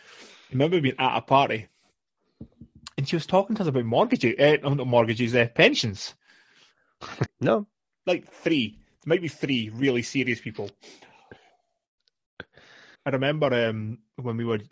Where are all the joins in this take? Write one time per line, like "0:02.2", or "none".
0:07.3
0:12.9

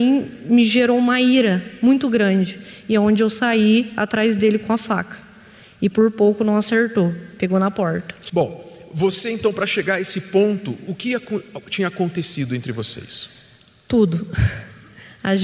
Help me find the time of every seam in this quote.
none

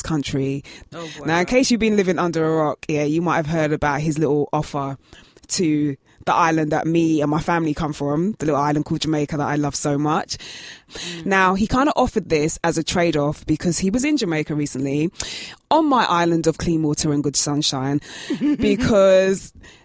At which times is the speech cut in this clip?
0:00.9
0:10.9

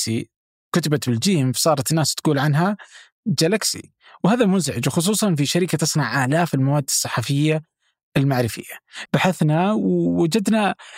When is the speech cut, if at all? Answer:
0:09.1

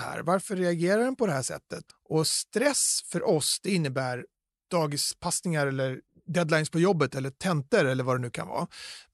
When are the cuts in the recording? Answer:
0:01.9

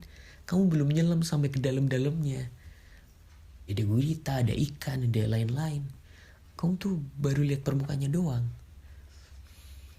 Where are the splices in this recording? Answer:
0:03.7

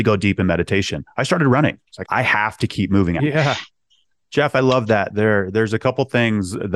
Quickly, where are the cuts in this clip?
0:02.0
0:03.2

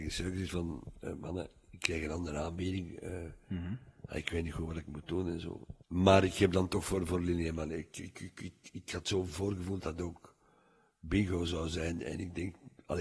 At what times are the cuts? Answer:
0:05.8
0:09.8

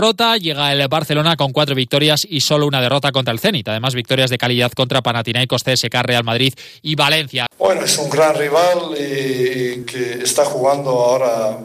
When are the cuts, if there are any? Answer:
0:07.5
0:09.8

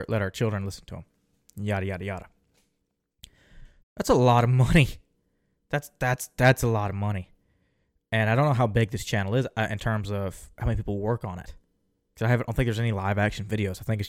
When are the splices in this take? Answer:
0:03.8

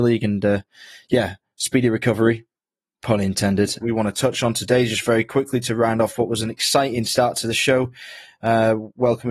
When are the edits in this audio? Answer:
0:03.8

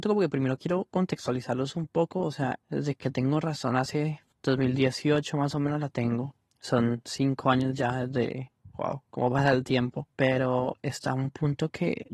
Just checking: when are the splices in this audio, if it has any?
0:02.6

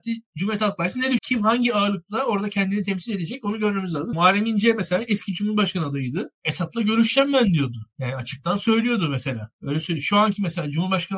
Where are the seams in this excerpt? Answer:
0:01.2
0:04.1

